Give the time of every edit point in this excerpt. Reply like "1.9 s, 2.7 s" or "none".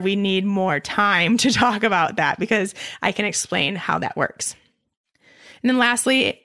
none